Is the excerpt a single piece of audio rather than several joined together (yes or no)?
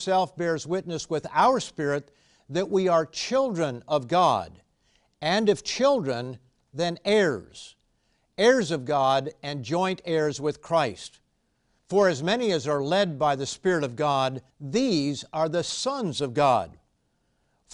no